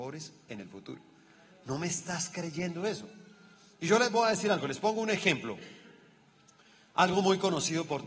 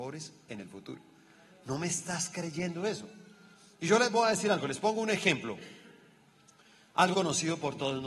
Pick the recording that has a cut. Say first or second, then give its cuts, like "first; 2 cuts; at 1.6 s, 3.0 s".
second; 1 cut; at 7.1 s